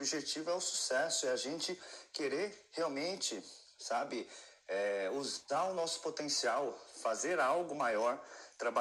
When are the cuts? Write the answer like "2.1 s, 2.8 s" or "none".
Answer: none